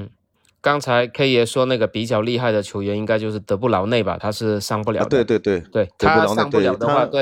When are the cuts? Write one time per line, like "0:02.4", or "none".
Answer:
none